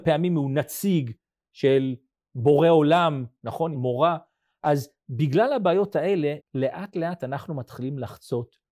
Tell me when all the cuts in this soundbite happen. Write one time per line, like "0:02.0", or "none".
0:03.7
0:06.4